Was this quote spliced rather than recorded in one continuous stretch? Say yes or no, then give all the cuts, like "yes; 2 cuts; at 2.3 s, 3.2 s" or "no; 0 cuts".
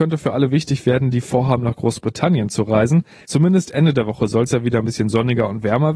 yes; 1 cut; at 3.2 s